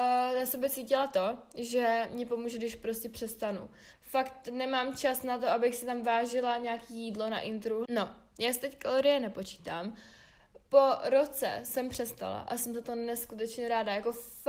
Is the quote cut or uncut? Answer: cut